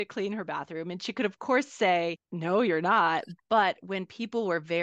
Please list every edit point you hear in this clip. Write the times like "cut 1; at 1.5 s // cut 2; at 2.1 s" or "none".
none